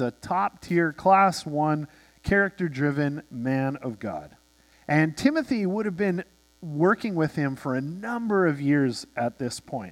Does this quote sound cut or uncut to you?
cut